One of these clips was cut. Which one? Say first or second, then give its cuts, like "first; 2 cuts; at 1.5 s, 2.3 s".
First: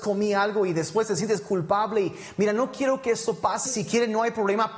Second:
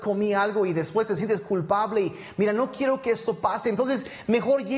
first; 1 cut; at 3.7 s